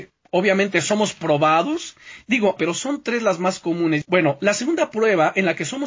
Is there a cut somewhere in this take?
yes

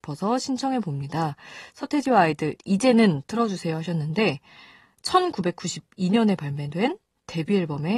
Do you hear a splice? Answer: no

